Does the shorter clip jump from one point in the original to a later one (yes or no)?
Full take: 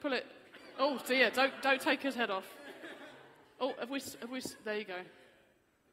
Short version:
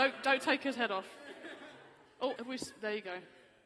yes